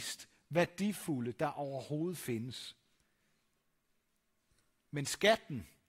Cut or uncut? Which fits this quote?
uncut